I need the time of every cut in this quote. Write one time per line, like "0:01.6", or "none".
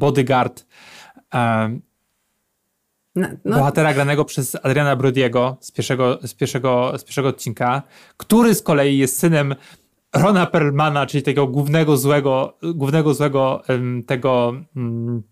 none